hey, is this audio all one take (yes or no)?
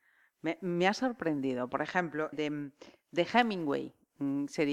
no